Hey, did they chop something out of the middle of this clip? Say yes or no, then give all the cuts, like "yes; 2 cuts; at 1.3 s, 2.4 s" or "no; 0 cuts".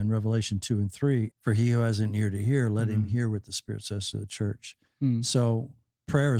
yes; 1 cut; at 1.3 s